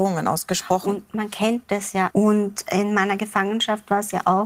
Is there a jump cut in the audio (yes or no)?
yes